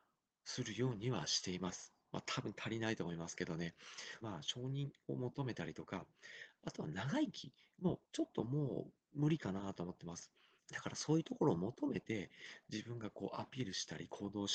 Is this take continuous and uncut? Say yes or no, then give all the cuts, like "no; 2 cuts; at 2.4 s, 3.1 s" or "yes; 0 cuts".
no; 3 cuts; at 4.2 s, 8.0 s, 10.6 s